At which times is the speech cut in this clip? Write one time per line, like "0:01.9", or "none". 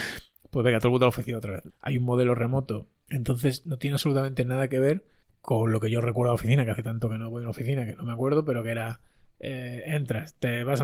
0:01.7
0:03.1